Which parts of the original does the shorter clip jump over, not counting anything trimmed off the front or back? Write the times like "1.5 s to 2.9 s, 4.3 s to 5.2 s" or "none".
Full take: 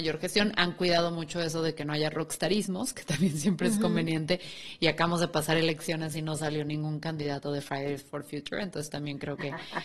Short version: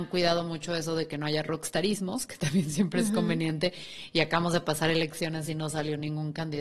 none